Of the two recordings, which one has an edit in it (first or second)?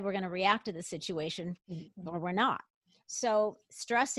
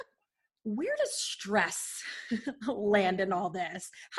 first